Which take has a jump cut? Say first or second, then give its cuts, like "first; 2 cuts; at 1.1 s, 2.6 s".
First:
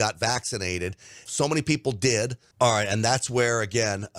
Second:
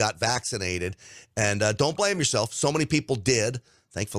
first; 2 cuts; at 1.3 s, 2.5 s